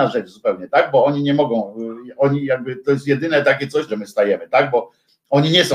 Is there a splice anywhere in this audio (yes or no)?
yes